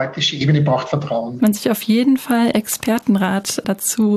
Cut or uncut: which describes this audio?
cut